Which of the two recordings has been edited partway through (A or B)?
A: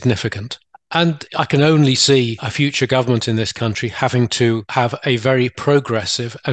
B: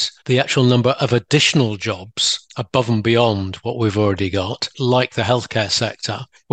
B